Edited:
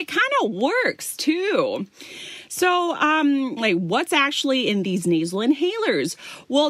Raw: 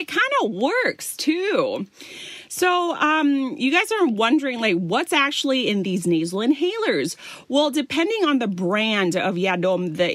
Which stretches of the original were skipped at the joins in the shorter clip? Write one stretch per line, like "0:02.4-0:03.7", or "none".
0:03.6-0:04.6

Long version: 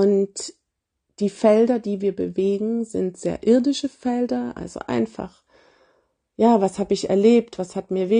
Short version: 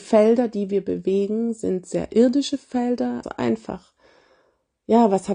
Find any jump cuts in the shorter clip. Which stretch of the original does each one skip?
0:04.5-0:04.7

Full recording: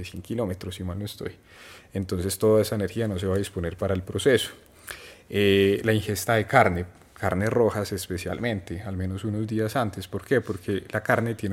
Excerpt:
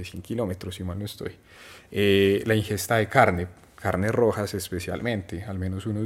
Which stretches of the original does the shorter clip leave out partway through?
0:01.9-0:05.2

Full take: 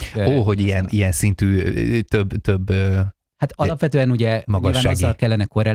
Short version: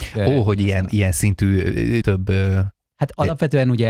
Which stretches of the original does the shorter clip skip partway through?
0:02.0-0:02.4

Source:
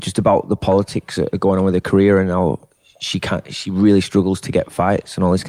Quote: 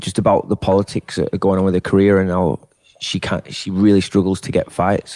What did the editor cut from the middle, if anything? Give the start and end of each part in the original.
none

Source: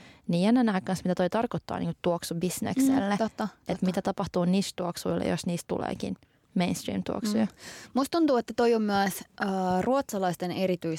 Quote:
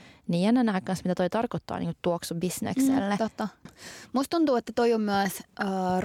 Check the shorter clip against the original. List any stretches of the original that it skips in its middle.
0:03.7-0:07.5

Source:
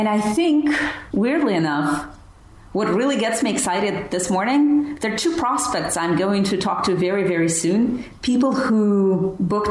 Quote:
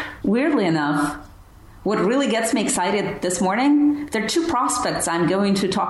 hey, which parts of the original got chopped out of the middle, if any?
none

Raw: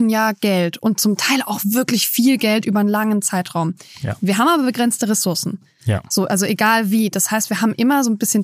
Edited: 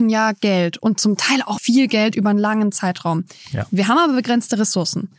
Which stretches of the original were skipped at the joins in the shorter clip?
0:01.6-0:02.1

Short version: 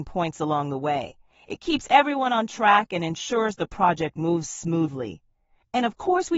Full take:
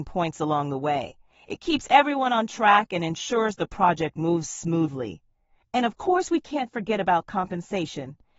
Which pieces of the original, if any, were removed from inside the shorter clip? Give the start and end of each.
none

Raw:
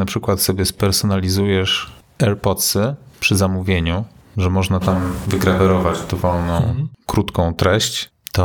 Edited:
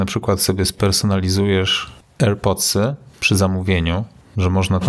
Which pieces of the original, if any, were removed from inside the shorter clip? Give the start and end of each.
none

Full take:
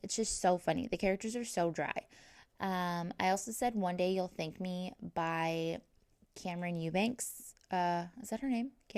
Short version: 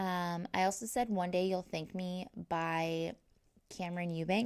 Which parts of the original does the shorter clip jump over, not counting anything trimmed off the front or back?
none

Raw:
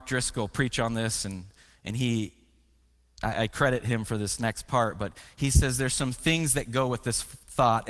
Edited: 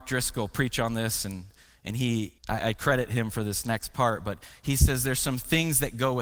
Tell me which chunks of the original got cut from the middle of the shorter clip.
0:02.4-0:03.1

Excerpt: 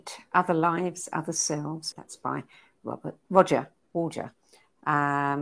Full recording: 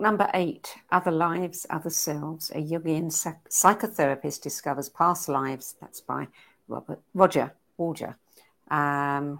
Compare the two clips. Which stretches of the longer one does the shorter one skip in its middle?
0:02.5-0:05.8

